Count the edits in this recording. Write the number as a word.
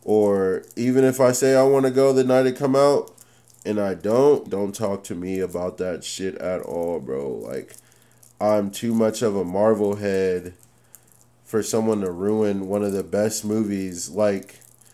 one